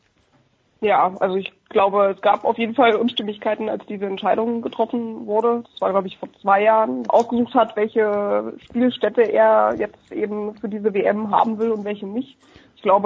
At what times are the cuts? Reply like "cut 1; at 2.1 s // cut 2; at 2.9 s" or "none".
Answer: cut 1; at 7.1 s